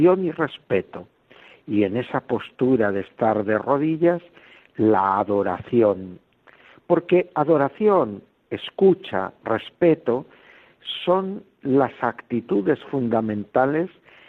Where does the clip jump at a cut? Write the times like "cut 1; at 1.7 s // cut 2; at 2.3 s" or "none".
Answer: none